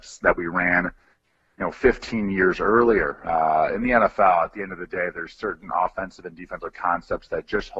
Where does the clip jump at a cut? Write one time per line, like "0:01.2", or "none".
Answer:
none